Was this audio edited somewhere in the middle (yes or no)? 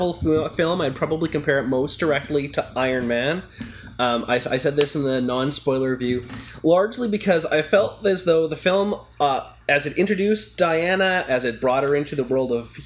no